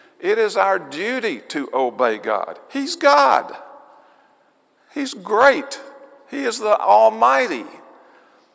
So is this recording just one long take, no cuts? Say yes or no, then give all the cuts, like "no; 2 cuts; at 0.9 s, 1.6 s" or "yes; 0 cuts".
yes; 0 cuts